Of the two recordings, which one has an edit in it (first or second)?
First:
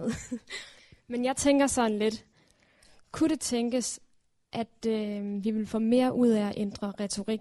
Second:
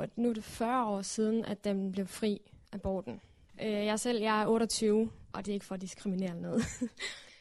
second